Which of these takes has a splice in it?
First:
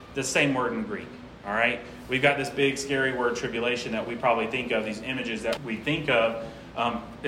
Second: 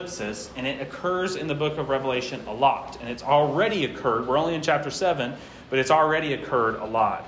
first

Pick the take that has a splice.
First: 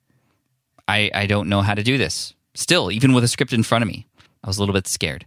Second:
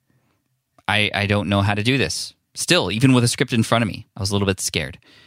second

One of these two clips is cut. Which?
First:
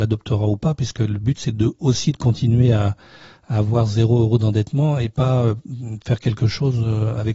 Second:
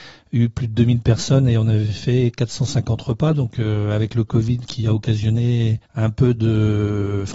second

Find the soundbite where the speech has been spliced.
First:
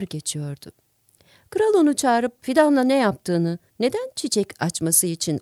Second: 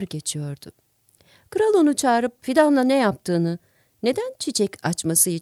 first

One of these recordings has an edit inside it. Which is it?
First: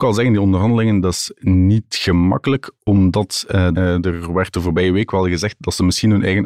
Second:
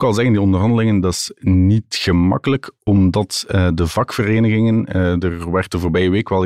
first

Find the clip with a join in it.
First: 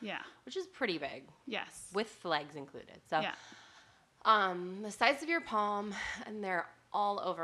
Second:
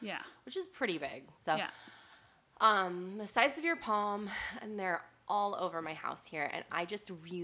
second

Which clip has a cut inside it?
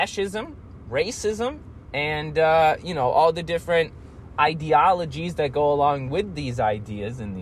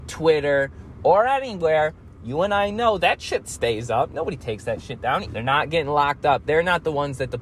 second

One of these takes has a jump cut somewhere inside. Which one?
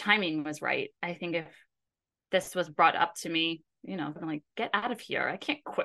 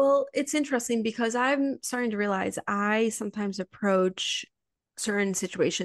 first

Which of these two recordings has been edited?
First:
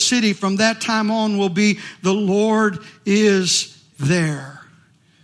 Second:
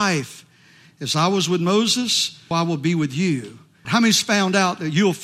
second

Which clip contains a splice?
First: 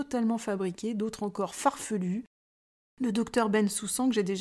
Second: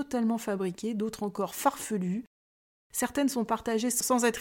first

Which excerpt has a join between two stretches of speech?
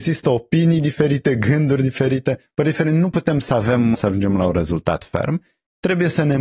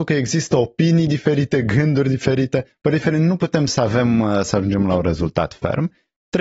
first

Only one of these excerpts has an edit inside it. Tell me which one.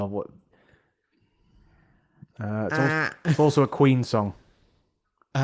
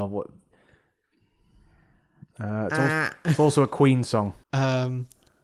second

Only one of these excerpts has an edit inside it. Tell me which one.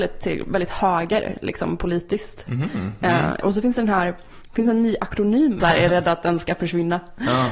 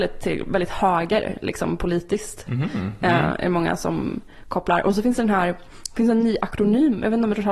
first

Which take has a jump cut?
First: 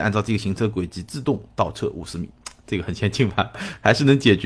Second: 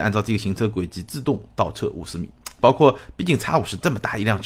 second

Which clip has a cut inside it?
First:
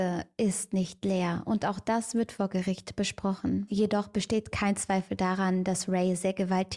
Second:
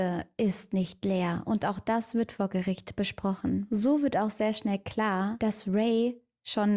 first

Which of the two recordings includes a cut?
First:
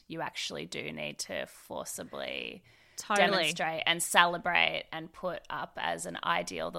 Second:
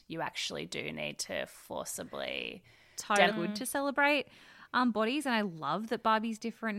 second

